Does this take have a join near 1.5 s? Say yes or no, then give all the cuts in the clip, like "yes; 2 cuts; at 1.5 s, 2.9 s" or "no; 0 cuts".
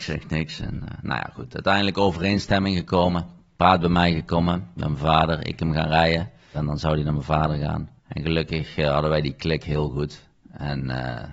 no; 2 cuts; at 6.5 s, 8.0 s